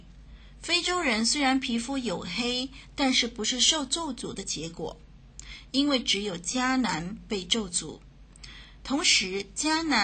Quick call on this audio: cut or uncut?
uncut